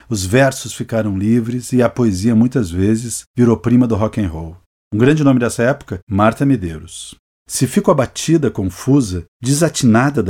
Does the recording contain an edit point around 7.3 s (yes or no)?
yes